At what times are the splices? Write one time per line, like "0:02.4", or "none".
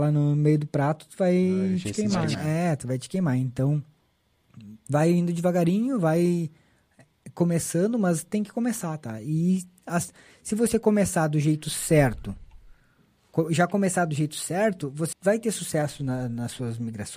0:02.3
0:15.1